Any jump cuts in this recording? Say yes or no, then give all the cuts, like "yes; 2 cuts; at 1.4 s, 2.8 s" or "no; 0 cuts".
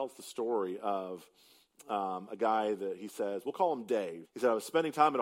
yes; 1 cut; at 4.3 s